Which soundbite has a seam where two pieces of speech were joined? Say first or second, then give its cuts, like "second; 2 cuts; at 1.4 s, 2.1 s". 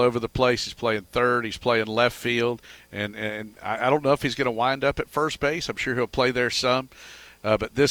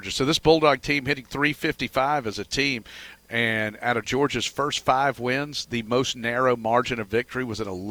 second; 1 cut; at 3.2 s